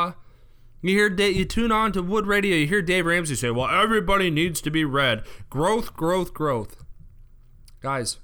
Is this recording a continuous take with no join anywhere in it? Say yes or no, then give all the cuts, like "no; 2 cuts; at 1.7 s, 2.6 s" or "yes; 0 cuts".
yes; 0 cuts